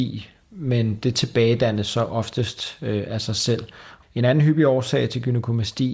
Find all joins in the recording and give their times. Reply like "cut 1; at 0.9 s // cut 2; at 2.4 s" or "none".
cut 1; at 4.0 s